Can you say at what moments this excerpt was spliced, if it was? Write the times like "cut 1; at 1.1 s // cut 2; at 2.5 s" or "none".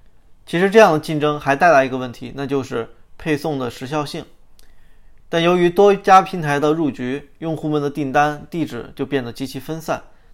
cut 1; at 5.2 s